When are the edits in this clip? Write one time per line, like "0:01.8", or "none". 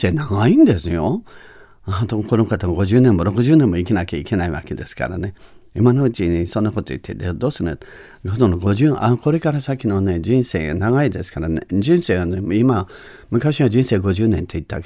none